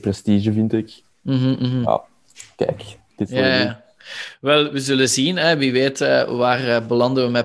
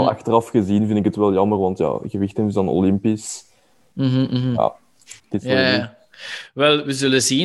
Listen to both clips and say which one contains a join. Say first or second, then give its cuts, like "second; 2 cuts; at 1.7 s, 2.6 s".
second; 2 cuts; at 3.9 s, 5.2 s